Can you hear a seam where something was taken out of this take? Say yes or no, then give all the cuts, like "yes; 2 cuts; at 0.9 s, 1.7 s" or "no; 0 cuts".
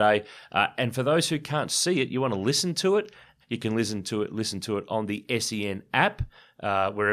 yes; 1 cut; at 3.4 s